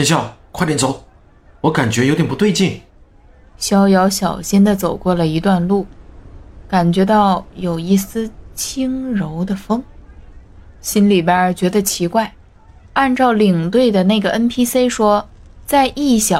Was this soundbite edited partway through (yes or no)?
yes